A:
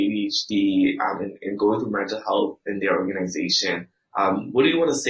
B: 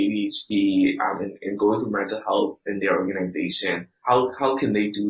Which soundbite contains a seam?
B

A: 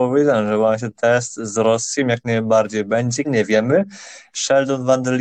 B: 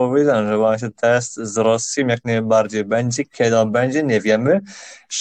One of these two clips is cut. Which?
A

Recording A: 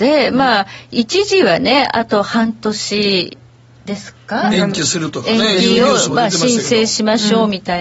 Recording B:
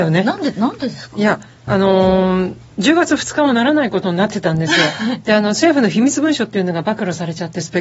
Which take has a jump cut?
B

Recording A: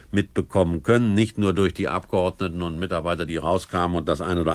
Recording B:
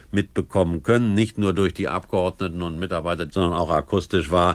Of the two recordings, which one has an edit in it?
B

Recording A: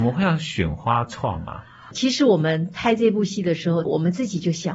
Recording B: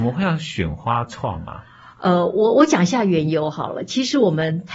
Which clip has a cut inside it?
A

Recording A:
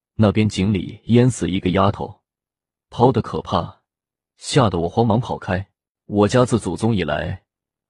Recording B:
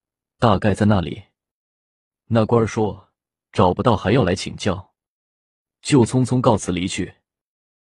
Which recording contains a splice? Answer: A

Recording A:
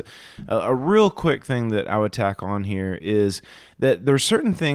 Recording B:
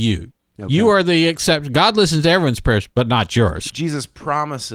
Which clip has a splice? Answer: B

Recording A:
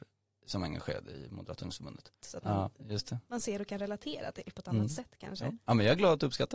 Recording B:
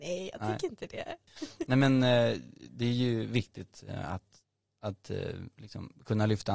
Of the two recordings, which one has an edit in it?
A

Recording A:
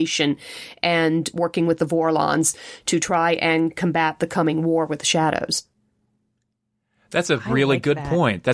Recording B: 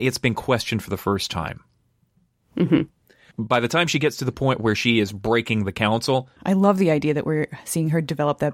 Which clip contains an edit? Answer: B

